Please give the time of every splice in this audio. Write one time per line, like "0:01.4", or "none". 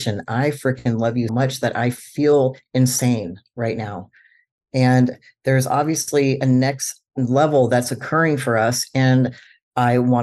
0:01.3